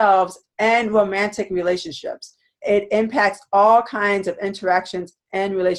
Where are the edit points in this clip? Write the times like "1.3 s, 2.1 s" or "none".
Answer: 2.6 s